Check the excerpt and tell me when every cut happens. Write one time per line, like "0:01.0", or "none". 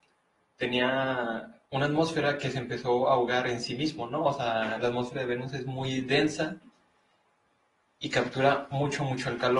0:01.7